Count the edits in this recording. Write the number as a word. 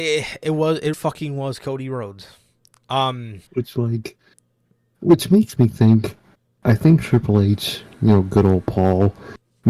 two